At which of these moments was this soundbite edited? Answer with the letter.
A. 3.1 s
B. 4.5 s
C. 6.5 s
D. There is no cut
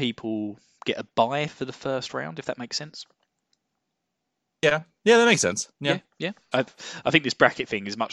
C